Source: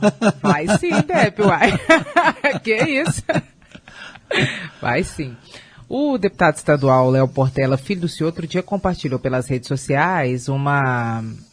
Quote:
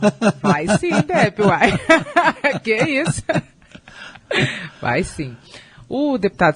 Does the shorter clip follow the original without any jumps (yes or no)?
yes